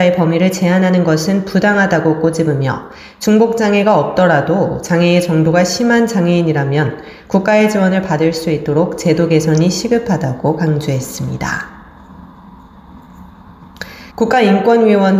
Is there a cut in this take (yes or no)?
yes